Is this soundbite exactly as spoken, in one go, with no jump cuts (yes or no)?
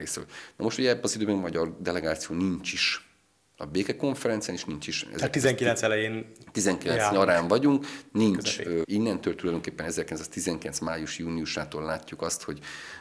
no